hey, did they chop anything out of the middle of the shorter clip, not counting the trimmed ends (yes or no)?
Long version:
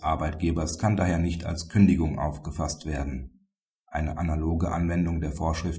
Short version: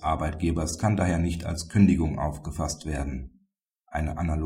no